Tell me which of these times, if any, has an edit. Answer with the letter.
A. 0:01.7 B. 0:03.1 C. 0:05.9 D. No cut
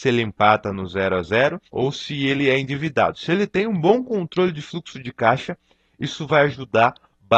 A